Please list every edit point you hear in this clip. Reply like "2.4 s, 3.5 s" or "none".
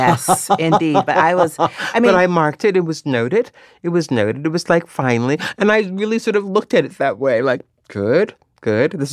none